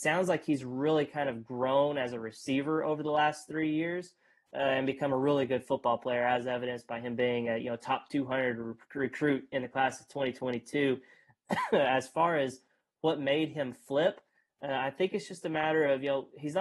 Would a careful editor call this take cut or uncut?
uncut